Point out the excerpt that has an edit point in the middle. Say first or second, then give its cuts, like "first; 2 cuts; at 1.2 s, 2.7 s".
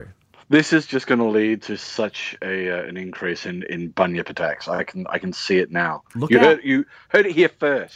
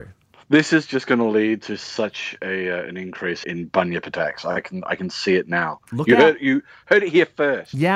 second; 1 cut; at 3.4 s